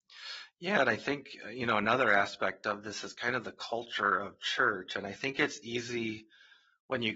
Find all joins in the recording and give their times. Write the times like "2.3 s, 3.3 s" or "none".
none